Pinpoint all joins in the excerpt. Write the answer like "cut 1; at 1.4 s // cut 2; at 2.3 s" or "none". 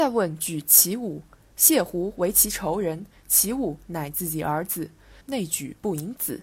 cut 1; at 5.2 s